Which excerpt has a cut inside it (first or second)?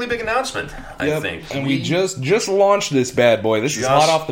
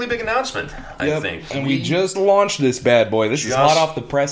second